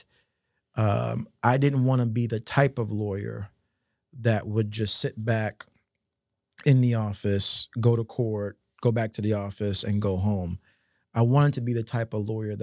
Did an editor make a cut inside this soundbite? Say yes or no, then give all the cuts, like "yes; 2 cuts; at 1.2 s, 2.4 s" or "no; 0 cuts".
no; 0 cuts